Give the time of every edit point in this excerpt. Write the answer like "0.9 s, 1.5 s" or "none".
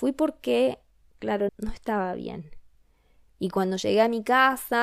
1.5 s